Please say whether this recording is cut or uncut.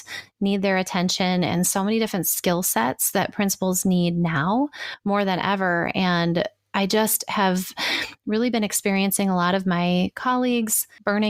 uncut